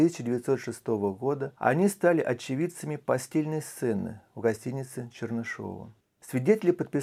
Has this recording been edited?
yes; 1 cut; at 6.0 s

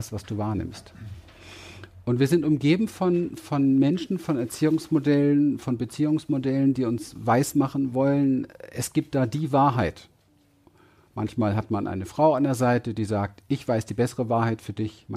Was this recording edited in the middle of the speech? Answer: no; 0 cuts

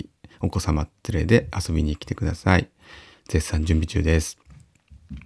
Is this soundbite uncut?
no; 1 cut; at 3.1 s

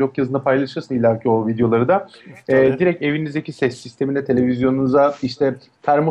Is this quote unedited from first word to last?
yes; 0 cuts

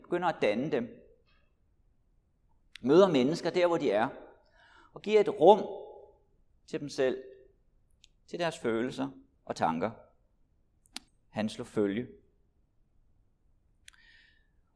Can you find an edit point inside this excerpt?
yes; 1 cut; at 11.1 s

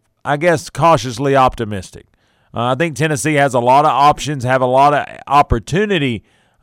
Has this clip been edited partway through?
no; 0 cuts

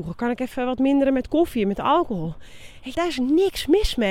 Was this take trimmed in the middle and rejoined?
yes; 1 cut; at 2.9 s

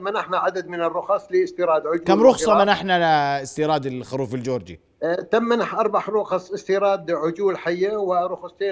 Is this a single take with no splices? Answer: yes; 0 cuts

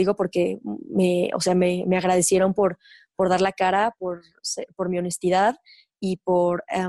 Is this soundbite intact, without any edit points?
yes; 0 cuts

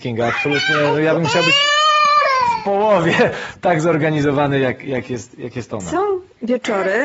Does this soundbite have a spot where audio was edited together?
no; 0 cuts

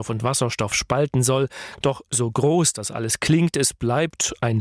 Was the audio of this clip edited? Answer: yes; 1 cut; at 1.8 s

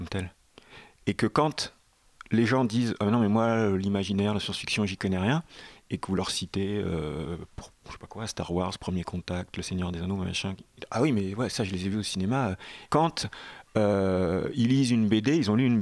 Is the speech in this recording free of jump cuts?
no; 1 cut; at 12.9 s

